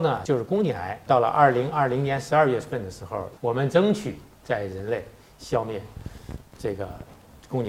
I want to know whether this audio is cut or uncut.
cut